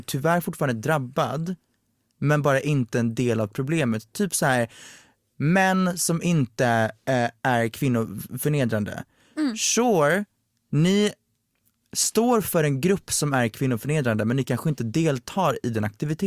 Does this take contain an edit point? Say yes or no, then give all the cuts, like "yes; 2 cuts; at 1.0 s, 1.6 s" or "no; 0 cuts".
no; 0 cuts